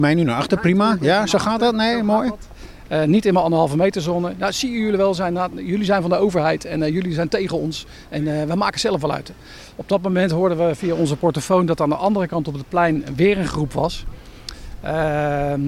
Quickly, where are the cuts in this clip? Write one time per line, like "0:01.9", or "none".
none